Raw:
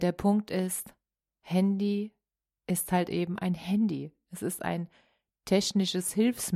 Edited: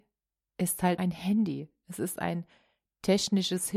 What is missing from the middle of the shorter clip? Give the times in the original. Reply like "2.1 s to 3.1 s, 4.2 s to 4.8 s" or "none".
3.1 s to 3.4 s